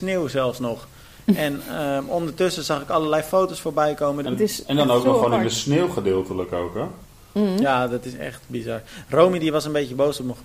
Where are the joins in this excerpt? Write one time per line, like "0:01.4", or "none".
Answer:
0:04.2

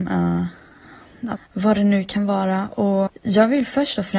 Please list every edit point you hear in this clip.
0:01.4
0:03.1

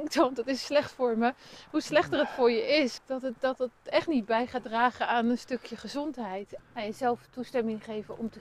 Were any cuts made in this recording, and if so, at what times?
0:03.0
0:06.6

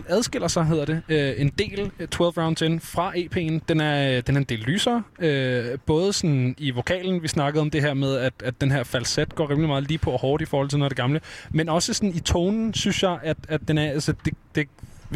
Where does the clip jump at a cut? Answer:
none

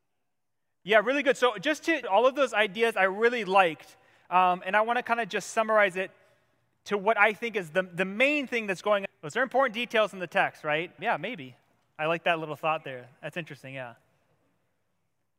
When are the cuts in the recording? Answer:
0:02.0
0:09.1
0:11.0

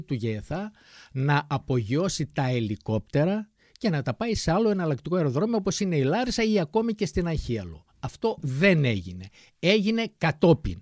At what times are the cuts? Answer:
none

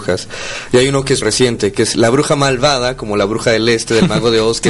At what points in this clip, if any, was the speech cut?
0:01.2

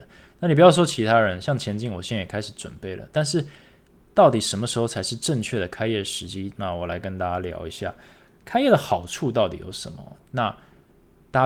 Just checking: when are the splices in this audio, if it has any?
0:06.5
0:10.2

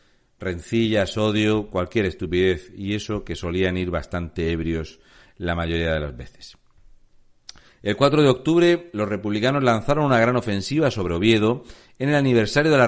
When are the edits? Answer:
none

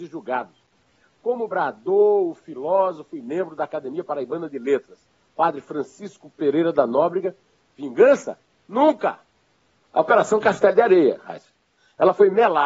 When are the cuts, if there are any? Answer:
0:07.6
0:09.8

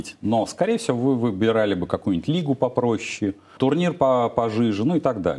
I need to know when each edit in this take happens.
0:03.6

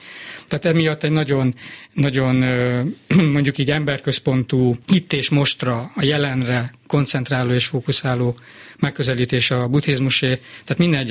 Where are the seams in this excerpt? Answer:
0:04.8

